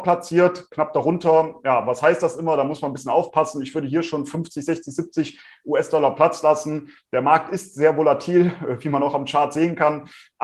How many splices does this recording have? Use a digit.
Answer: 0